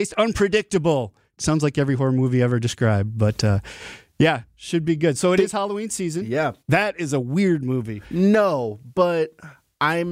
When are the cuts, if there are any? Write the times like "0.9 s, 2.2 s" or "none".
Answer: 1.4 s, 6.6 s, 8.0 s

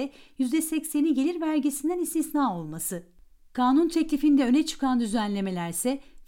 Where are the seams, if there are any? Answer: 3.5 s

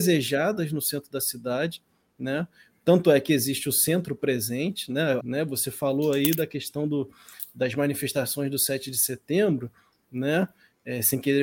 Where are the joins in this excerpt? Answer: 5.2 s

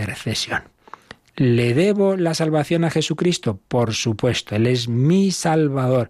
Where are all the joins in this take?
none

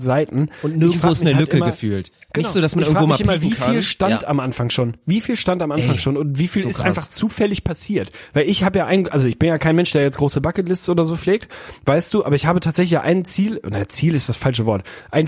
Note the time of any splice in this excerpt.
none

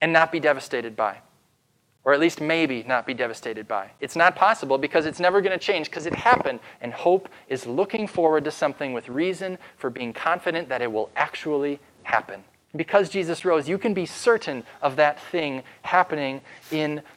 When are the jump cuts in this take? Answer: 6.7 s, 12.6 s

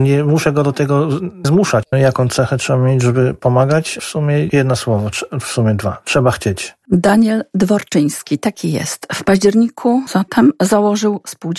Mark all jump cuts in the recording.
1.8 s, 10.1 s

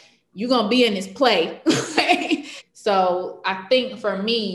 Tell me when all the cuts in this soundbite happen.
2.6 s

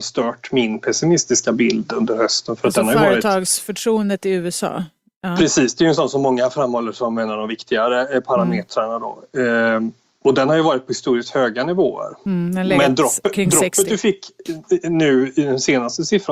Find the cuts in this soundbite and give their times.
none

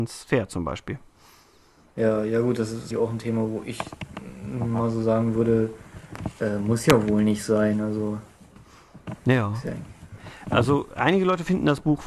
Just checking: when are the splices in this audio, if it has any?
2.9 s

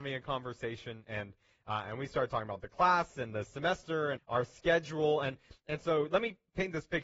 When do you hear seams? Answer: 4.2 s

